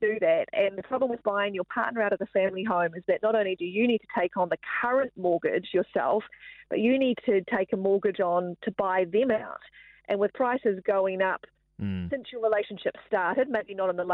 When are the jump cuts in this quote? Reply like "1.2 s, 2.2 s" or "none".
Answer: none